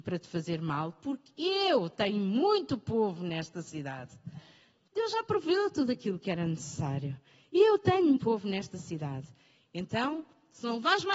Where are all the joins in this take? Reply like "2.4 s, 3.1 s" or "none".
8.2 s